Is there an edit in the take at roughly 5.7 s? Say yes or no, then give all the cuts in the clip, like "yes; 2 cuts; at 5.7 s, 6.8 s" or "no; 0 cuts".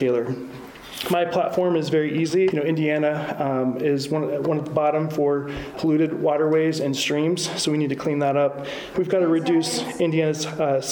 yes; 3 cuts; at 2.5 s, 5.7 s, 8.9 s